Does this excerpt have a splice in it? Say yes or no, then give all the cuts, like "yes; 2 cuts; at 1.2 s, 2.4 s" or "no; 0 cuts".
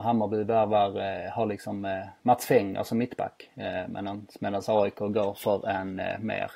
no; 0 cuts